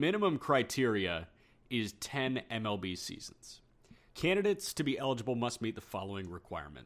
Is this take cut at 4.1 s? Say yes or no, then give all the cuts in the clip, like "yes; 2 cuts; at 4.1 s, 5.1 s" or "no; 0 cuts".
yes; 1 cut; at 4.1 s